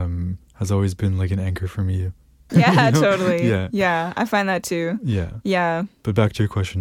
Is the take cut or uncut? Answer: cut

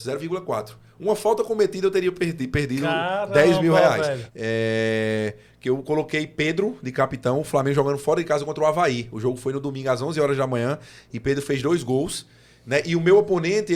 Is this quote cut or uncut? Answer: cut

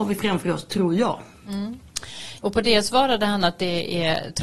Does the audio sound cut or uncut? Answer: cut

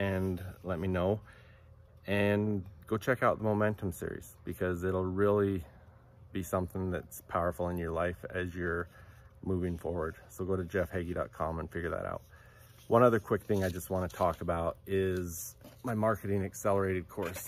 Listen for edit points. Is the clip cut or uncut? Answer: uncut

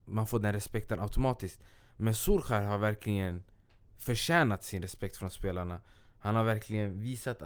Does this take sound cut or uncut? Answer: uncut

